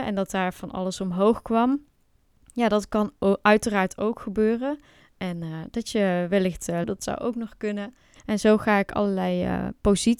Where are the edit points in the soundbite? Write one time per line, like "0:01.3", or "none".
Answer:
0:05.0
0:06.8
0:08.2